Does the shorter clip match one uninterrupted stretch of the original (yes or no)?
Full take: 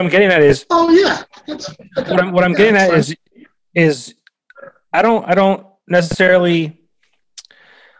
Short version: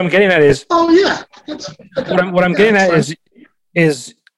yes